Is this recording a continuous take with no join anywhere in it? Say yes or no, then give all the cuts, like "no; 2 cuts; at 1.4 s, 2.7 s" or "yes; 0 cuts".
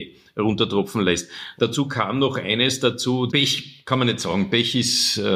no; 2 cuts; at 1.6 s, 3.3 s